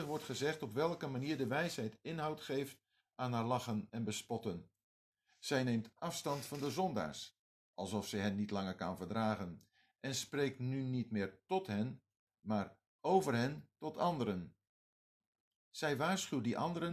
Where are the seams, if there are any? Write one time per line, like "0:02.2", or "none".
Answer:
none